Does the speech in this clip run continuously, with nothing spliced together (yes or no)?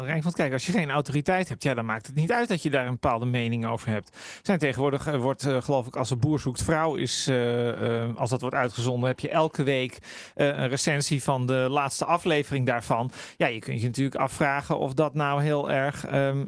yes